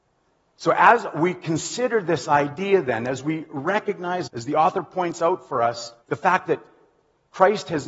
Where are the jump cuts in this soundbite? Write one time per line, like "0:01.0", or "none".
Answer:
0:04.3
0:06.0

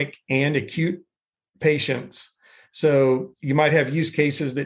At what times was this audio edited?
none

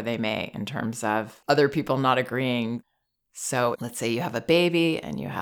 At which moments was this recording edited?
0:03.7

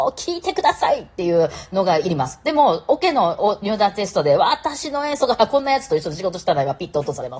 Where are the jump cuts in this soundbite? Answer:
none

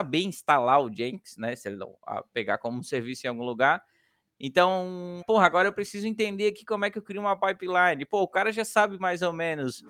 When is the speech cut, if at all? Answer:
0:05.2

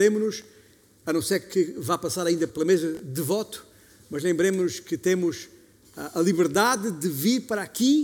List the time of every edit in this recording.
0:02.5

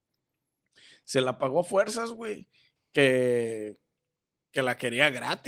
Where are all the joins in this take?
0:02.8

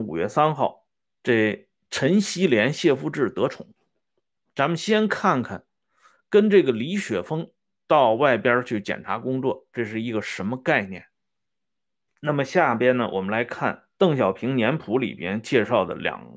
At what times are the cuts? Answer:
0:01.1
0:12.1

